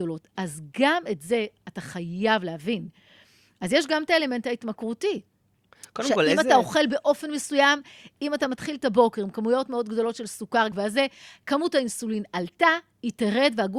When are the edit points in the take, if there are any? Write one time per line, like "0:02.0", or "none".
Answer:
0:08.2
0:10.7